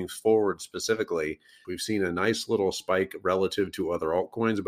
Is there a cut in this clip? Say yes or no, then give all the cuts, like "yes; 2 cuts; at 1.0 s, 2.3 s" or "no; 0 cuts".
yes; 1 cut; at 1.6 s